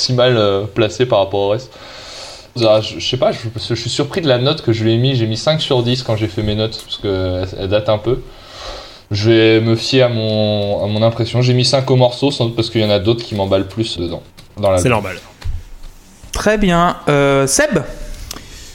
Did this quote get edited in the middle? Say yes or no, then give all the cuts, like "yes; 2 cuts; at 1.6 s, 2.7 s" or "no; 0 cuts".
yes; 2 cuts; at 2.6 s, 14.0 s